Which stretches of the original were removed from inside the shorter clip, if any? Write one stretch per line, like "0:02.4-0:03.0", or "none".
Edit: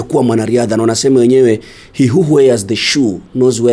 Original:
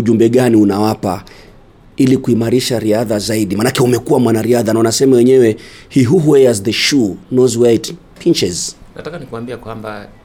none